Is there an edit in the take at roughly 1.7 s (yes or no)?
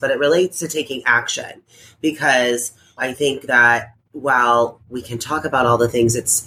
no